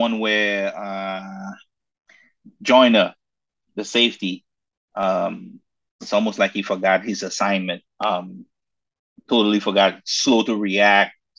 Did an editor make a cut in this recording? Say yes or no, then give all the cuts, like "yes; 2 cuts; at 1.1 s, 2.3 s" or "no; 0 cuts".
no; 0 cuts